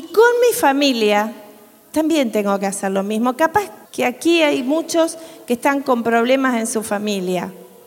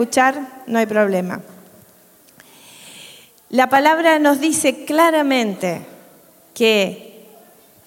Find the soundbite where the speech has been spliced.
first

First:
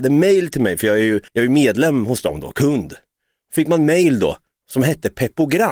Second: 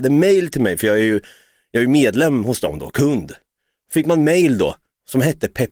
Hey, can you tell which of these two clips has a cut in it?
first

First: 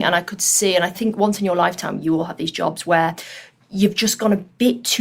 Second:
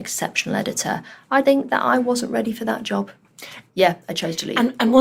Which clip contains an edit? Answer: second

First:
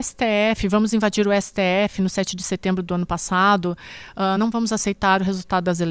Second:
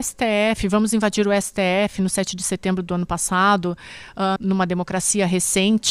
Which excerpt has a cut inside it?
second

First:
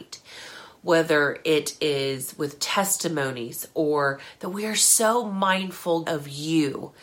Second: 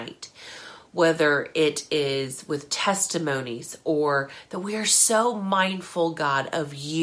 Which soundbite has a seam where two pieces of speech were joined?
first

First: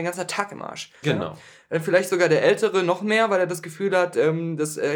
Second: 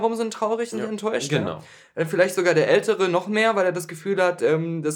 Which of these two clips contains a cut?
first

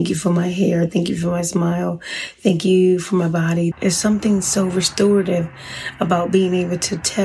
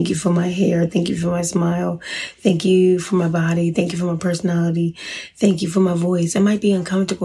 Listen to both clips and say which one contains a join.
first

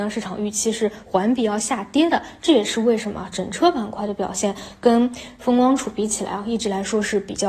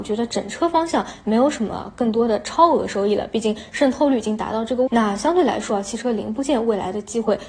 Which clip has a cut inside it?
second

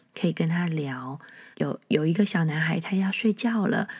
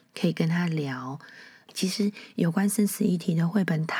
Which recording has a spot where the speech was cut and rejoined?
first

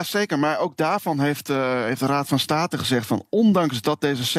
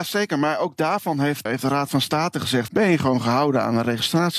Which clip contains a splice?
second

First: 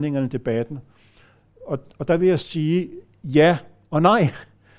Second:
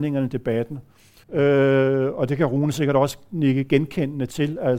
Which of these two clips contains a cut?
second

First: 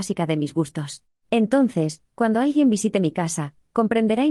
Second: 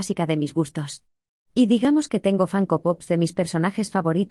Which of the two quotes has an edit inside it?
first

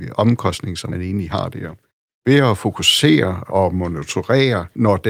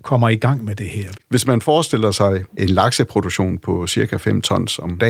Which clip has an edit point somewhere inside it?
second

